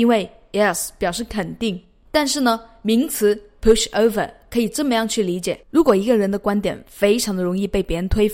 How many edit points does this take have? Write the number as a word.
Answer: two